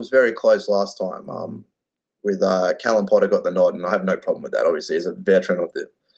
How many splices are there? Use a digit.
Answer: 0